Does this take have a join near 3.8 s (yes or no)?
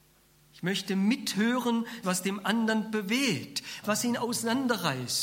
yes